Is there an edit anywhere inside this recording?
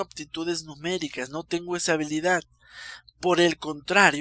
no; 0 cuts

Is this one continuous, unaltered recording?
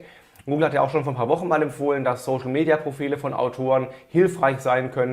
yes; 0 cuts

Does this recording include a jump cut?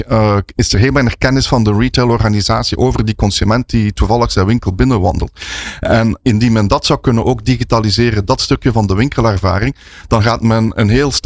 no; 0 cuts

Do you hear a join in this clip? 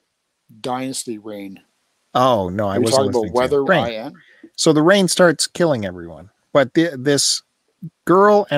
yes; 1 cut; at 3.7 s

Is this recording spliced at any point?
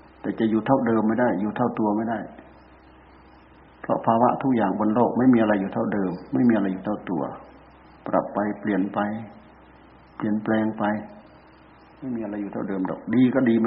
no; 0 cuts

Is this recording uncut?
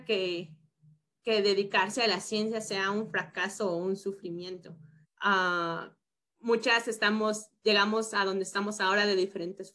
no; 1 cut; at 5.0 s

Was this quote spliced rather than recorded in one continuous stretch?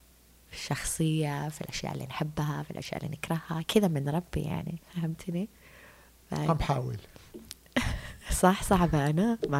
yes; 1 cut; at 4.8 s

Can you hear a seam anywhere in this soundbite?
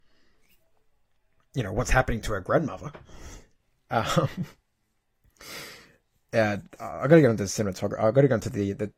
no; 0 cuts

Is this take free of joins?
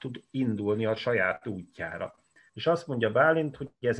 no; 1 cut; at 2.5 s

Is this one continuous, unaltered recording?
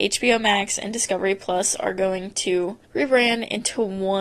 no; 1 cut; at 2.9 s

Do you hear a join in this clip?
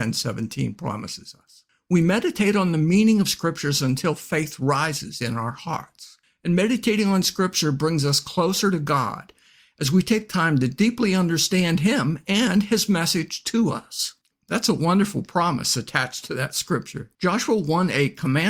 yes; 2 cuts; at 14.3 s, 17.1 s

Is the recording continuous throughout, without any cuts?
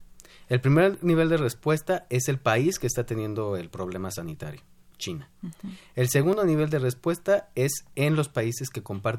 yes; 0 cuts

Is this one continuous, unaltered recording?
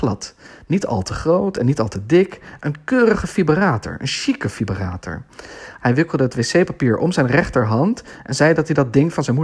no; 1 cut; at 5.8 s

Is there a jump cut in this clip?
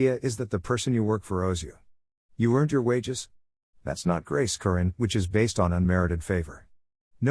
no; 0 cuts

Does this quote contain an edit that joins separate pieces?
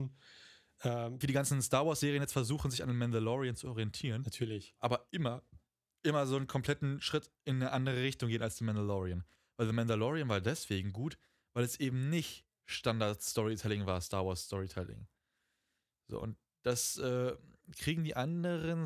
yes; 1 cut; at 1.2 s

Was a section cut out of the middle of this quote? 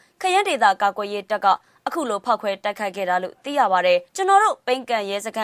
yes; 1 cut; at 4.1 s

